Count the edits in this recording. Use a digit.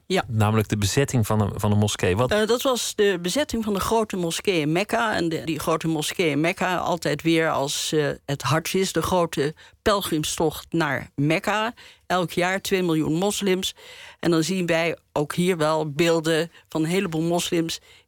2